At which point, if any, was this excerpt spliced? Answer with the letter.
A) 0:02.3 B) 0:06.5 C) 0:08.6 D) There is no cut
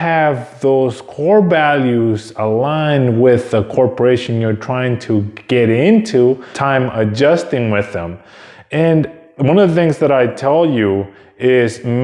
B